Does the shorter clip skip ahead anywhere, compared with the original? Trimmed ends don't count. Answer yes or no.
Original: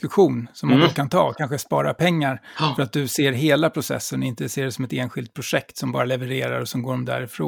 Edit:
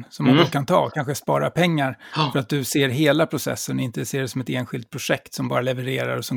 no